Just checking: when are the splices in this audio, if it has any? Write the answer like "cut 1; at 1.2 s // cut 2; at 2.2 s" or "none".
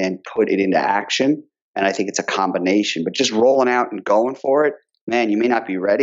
none